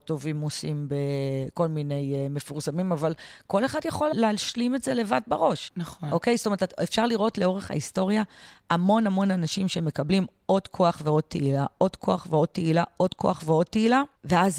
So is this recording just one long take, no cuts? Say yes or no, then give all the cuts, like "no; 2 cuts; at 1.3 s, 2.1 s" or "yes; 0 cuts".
yes; 0 cuts